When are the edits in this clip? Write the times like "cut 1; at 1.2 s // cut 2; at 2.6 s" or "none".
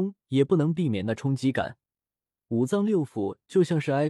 none